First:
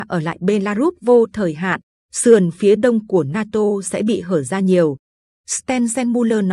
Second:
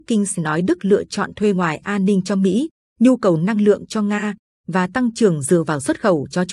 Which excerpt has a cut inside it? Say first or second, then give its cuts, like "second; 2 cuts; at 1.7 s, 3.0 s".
first; 1 cut; at 5.3 s